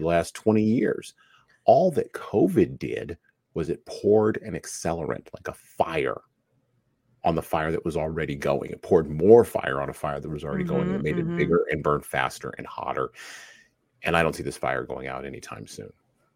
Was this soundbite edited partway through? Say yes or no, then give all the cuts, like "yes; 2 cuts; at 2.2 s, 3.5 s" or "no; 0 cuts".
no; 0 cuts